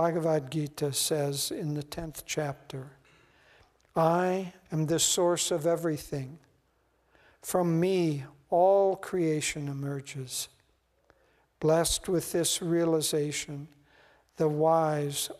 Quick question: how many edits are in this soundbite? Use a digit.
0